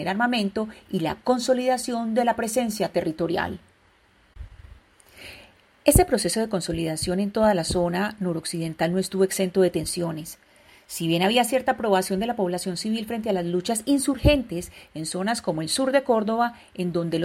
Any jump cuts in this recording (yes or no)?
no